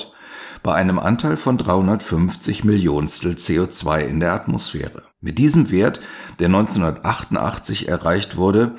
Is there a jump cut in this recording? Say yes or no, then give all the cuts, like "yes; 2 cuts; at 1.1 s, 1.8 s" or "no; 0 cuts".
yes; 1 cut; at 5.1 s